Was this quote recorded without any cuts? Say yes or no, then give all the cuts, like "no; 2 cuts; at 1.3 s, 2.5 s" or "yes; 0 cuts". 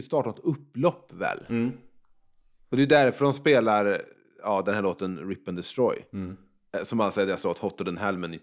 yes; 0 cuts